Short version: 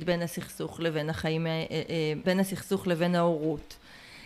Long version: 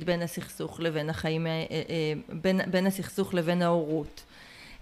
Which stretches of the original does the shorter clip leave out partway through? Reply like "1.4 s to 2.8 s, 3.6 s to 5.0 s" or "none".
2.2 s to 2.7 s